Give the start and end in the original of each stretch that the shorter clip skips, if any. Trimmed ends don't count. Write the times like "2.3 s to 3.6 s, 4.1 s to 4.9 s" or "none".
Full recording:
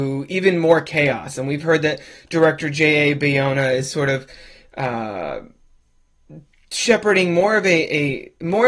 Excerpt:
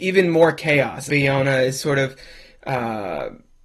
1.4 s to 3.2 s